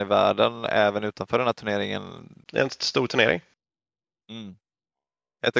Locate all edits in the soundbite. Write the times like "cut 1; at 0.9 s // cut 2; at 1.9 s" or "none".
cut 1; at 2.4 s